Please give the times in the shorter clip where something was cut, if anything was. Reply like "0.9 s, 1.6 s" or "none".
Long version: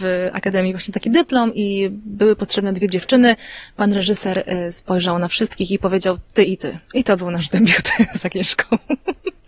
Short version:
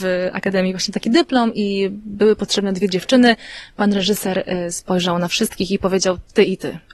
none